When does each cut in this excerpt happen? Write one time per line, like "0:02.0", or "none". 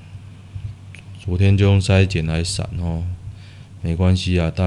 none

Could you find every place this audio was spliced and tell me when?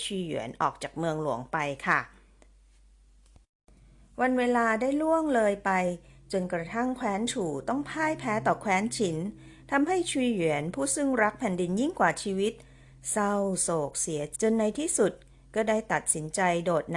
0:14.3

